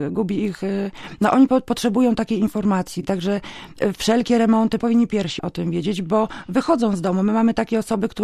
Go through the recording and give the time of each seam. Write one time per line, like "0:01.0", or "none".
none

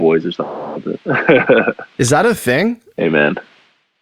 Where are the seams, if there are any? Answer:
0:02.9

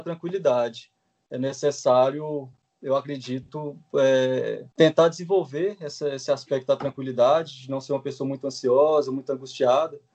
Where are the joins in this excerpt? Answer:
0:04.7

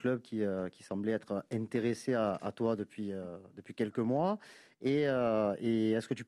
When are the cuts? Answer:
none

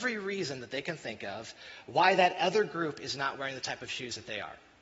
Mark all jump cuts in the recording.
none

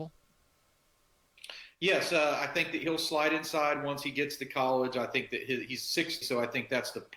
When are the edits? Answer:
0:06.2

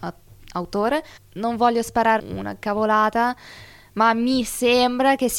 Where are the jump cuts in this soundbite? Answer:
0:01.2
0:02.2

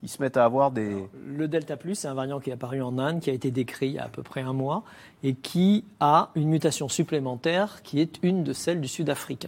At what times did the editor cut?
none

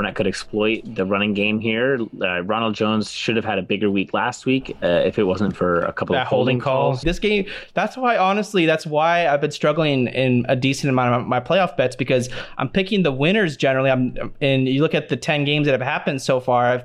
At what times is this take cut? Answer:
0:07.0

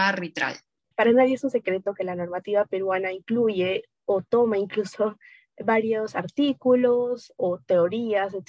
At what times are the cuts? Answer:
0:00.9

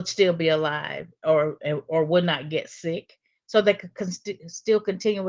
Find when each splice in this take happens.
none

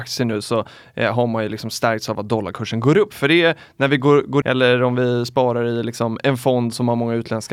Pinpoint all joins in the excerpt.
0:04.4

